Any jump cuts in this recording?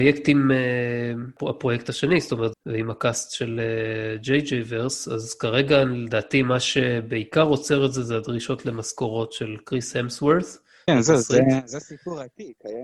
yes; 2 cuts; at 2.5 s, 10.9 s

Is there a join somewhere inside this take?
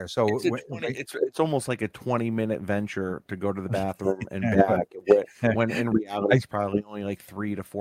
no; 0 cuts

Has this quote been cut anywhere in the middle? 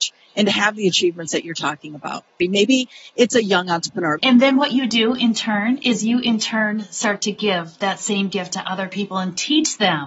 yes; 2 cuts; at 2.4 s, 4.2 s

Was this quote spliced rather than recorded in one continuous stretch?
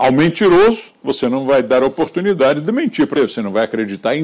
yes; 1 cut; at 3.2 s

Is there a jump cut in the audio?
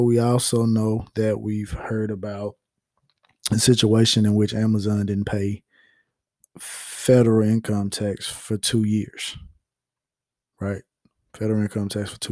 no; 0 cuts

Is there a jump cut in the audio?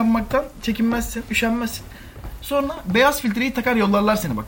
no; 0 cuts

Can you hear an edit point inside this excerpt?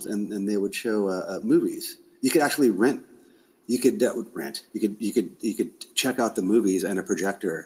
no; 0 cuts

